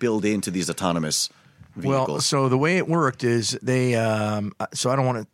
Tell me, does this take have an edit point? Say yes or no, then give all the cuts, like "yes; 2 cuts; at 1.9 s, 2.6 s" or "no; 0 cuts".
no; 0 cuts